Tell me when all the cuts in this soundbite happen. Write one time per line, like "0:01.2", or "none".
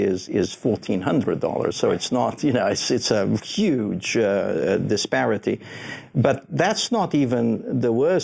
none